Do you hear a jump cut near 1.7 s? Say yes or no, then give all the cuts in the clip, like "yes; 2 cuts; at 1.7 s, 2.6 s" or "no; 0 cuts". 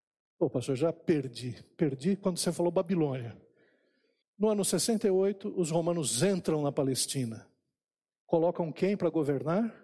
no; 1 cut; at 4.2 s